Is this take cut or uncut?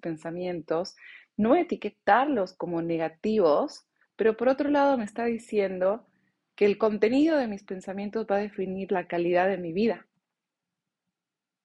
uncut